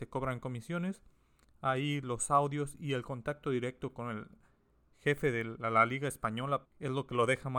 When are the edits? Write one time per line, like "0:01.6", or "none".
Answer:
0:01.4
0:06.6